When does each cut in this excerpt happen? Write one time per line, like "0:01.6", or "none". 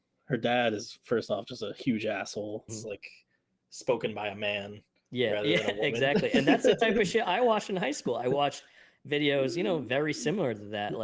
0:02.7